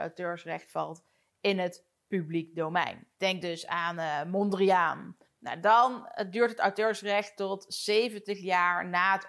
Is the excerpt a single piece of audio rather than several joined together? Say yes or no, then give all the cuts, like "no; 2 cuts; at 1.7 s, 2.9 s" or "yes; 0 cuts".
no; 2 cuts; at 3.1 s, 5.2 s